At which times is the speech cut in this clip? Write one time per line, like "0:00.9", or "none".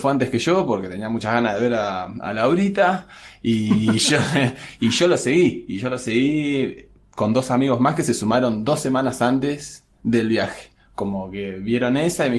none